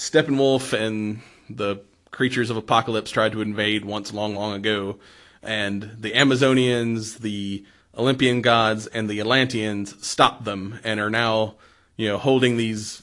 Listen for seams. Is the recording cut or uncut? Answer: cut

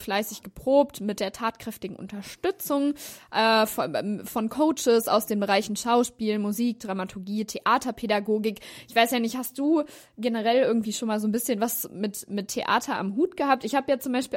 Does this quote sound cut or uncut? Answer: uncut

